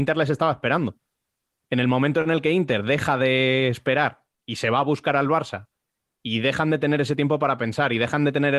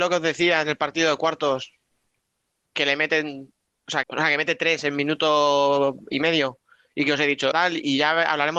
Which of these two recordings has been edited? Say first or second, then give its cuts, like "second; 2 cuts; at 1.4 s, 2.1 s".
second; 2 cuts; at 4.0 s, 7.5 s